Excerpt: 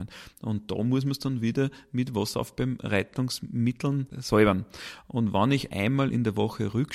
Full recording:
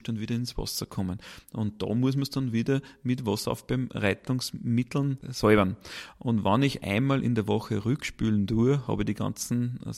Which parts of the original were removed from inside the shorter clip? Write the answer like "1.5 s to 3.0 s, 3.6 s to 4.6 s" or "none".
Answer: none

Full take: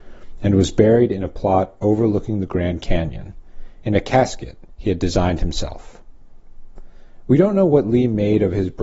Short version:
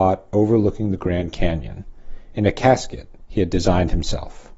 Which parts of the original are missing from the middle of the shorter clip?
none

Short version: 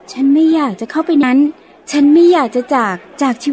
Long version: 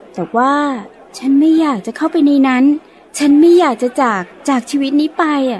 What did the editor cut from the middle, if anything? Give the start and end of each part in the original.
2.3 s to 2.5 s

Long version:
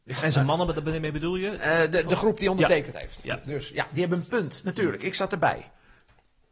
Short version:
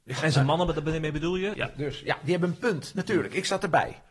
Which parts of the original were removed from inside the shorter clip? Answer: 1.5 s to 3.2 s

